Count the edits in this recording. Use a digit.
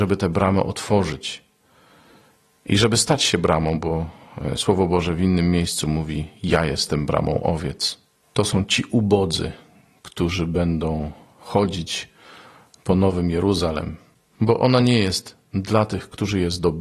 1